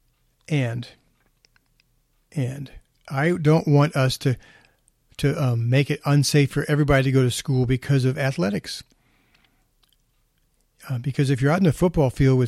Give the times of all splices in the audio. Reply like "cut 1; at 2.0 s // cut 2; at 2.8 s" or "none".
none